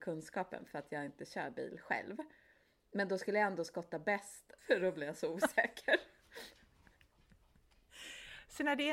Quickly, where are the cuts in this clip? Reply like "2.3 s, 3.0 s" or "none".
4.6 s